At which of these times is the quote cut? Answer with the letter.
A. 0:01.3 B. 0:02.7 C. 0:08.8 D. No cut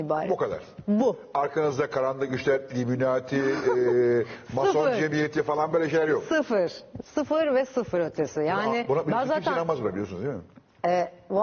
D